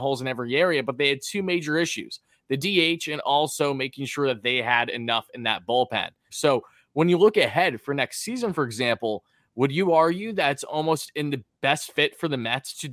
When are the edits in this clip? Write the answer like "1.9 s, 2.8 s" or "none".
6.3 s

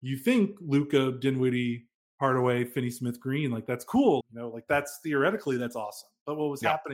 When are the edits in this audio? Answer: 4.2 s

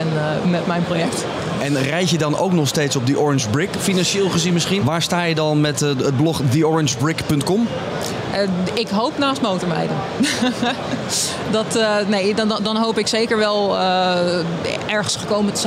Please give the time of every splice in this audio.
3.7 s, 4.8 s

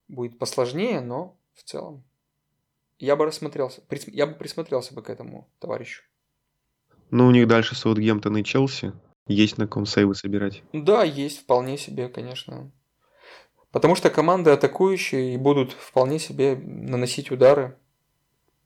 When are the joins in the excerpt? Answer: none

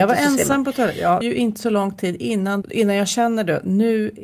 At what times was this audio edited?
1.2 s, 2.6 s

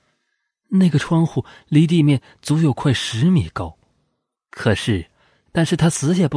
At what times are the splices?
5.5 s

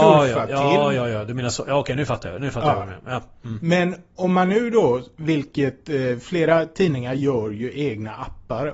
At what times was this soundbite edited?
none

